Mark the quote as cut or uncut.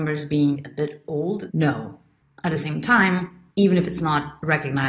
cut